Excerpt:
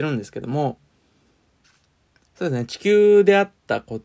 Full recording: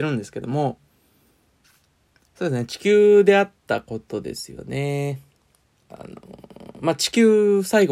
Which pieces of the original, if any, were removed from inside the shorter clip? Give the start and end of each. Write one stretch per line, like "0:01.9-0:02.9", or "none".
none